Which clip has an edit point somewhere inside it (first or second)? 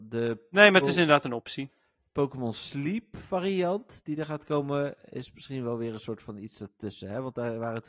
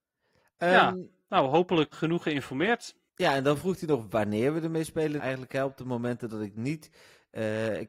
second